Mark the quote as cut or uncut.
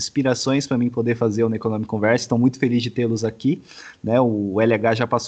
uncut